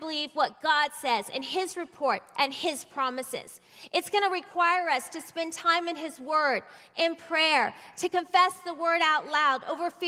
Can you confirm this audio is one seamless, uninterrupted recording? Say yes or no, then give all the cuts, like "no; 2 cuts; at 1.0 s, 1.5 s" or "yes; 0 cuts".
yes; 0 cuts